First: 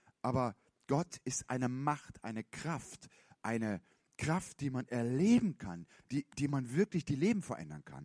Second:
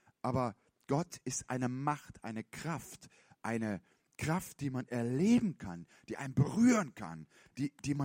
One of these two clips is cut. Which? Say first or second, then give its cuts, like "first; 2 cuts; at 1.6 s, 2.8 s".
first; 1 cut; at 5.9 s